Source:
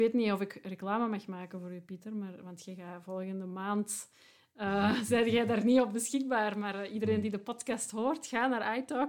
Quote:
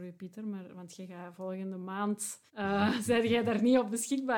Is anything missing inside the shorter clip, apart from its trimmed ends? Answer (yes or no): yes